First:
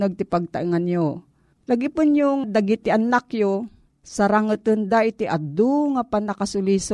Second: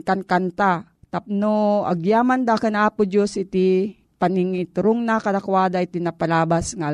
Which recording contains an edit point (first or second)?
first